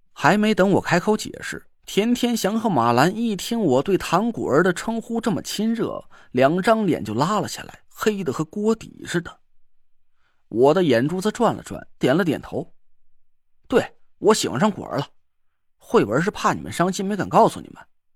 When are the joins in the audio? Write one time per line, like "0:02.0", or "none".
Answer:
0:12.0